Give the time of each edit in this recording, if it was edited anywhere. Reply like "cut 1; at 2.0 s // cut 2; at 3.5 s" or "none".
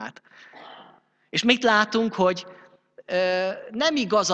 none